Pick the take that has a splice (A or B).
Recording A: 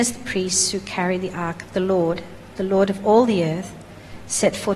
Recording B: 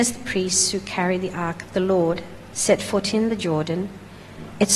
B